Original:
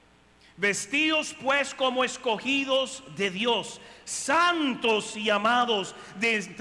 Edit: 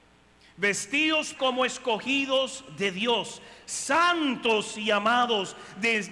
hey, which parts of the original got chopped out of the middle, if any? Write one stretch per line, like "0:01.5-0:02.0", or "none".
0:01.4-0:01.8